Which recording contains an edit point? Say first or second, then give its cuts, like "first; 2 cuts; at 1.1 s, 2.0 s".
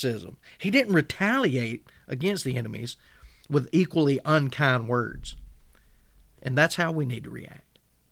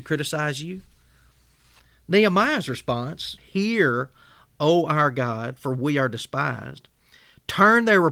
second; 1 cut; at 3.4 s